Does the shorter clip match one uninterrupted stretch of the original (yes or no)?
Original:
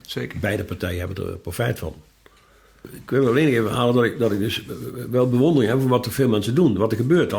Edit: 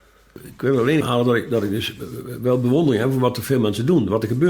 no